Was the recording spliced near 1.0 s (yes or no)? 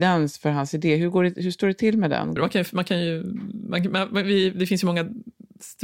no